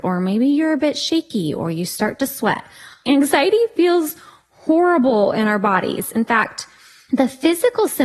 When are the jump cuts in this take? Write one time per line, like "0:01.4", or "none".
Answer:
0:02.9